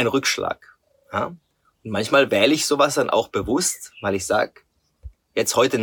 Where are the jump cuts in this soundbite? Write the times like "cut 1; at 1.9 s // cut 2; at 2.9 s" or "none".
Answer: none